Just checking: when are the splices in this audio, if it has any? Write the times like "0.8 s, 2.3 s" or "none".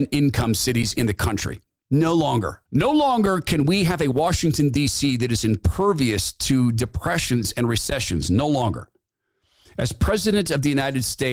2.7 s

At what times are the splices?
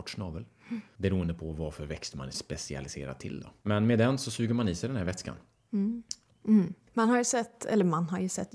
6.3 s

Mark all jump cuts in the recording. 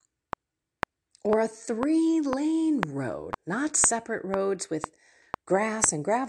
3.3 s

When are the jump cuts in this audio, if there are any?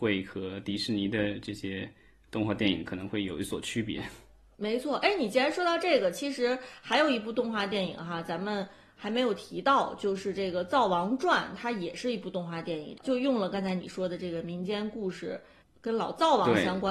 none

